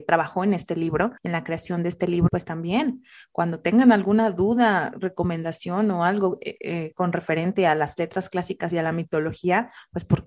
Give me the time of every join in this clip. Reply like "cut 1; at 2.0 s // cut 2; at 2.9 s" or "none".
cut 1; at 1.2 s // cut 2; at 2.3 s

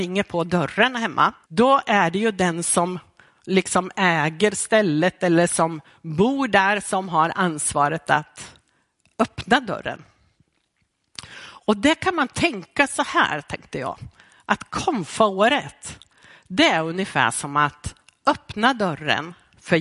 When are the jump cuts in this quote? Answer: cut 1; at 1.4 s

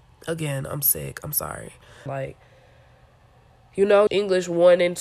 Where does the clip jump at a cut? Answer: cut 1; at 2.1 s // cut 2; at 4.1 s

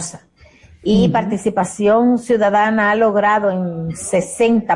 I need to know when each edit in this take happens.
none

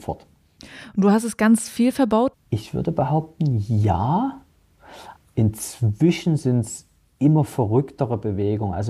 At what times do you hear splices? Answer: cut 1; at 2.3 s

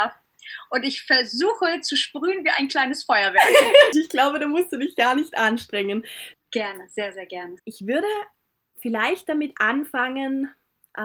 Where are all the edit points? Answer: cut 1; at 3.9 s // cut 2; at 6.3 s // cut 3; at 7.6 s

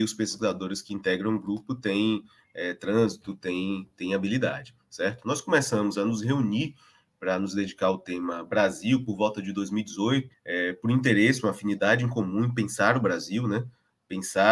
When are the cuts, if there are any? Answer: cut 1; at 10.3 s

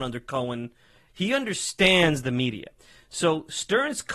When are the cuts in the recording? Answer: cut 1; at 1.1 s

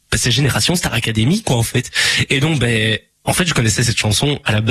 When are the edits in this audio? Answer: none

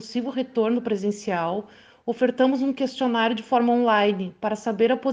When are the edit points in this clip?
none

